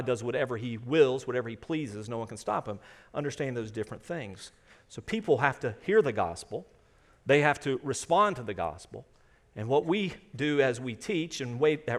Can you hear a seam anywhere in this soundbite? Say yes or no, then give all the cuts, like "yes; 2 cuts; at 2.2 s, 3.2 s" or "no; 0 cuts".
no; 0 cuts